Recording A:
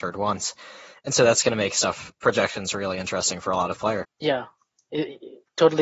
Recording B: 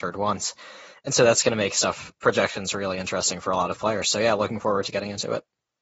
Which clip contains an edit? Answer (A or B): A